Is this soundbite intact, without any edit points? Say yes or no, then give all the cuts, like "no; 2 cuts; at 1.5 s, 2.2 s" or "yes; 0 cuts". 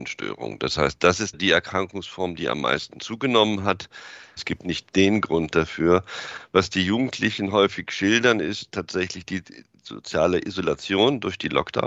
no; 1 cut; at 4.4 s